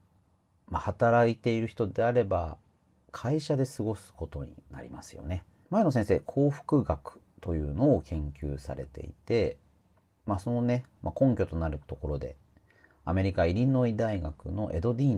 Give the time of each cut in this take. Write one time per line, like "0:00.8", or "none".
0:05.6